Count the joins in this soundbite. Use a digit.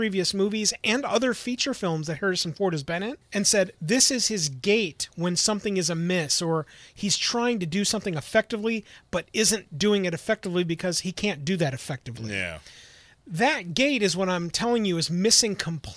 1